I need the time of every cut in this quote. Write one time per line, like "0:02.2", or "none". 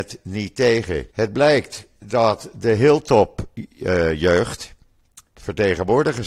0:01.1

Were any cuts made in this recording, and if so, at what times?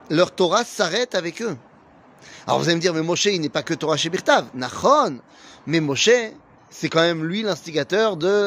none

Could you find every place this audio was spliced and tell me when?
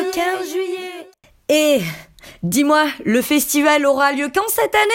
none

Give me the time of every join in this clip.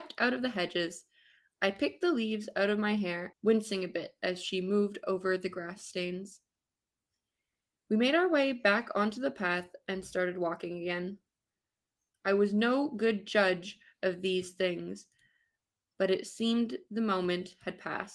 0:03.3
0:12.1

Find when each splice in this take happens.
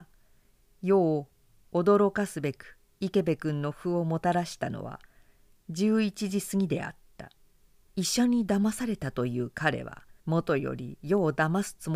0:07.8
0:10.2

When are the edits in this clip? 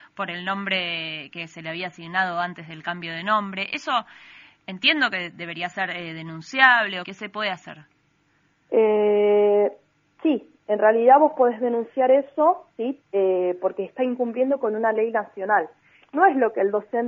0:07.0

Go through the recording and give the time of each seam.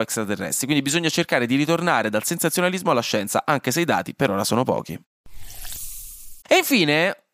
0:06.4

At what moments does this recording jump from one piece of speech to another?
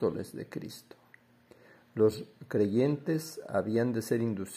none

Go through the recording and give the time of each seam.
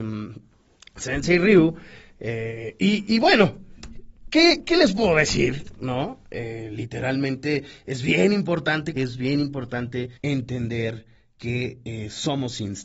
0:09.0
0:10.2

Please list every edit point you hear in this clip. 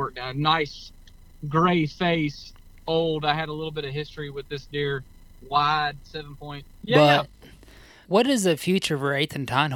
0:06.8
0:08.0

